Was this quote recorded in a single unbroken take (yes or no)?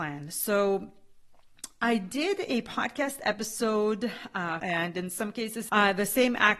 no